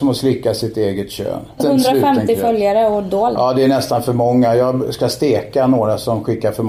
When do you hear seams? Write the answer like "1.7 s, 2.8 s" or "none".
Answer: 1.6 s